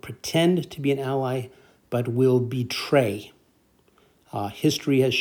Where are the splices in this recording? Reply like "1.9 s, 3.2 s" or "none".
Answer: none